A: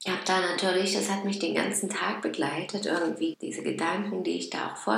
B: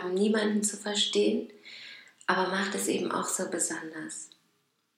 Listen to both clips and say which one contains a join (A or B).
A